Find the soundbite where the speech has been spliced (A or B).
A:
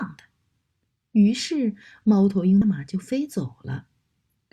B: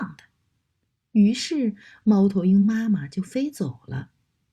A